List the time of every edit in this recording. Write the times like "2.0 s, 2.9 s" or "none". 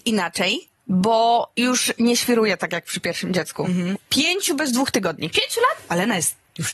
3.9 s